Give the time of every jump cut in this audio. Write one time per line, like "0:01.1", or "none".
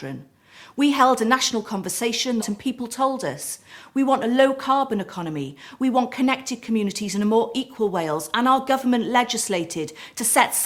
0:02.4
0:05.8